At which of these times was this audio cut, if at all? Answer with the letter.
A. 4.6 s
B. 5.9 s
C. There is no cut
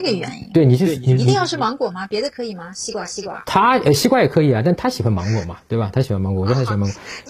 C